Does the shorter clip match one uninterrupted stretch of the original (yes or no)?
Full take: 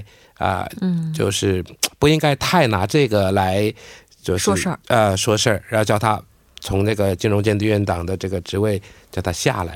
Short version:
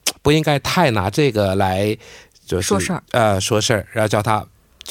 yes